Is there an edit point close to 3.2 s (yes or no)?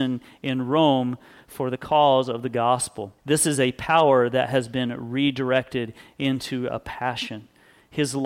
yes